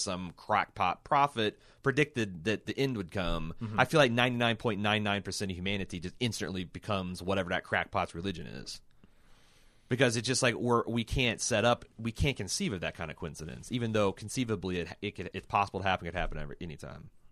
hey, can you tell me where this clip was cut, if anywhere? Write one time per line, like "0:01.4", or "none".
0:15.3